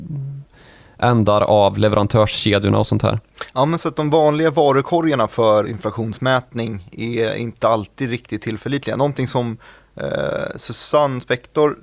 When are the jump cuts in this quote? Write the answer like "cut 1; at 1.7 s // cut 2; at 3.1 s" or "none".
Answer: cut 1; at 5.6 s